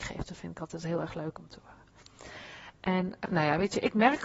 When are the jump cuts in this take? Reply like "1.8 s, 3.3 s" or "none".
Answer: 3.3 s